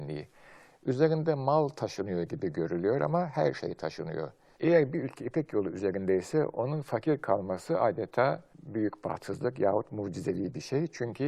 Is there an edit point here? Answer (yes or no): yes